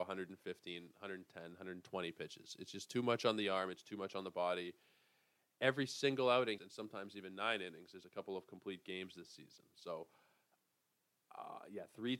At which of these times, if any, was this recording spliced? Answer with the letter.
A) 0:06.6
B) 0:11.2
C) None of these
A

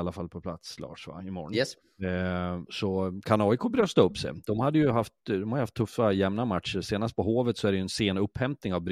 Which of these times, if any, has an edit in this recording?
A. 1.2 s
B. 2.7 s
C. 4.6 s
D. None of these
B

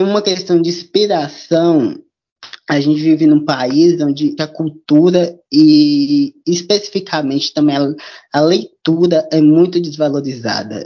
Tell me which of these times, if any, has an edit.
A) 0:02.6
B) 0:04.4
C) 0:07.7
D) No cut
B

